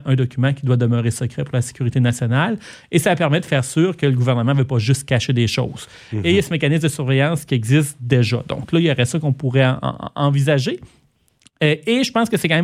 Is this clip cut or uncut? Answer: uncut